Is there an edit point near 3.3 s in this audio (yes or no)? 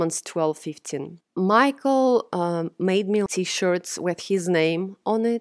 yes